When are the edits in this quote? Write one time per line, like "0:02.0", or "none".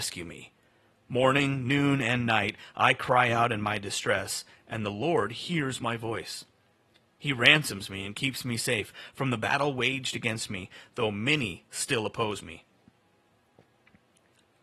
none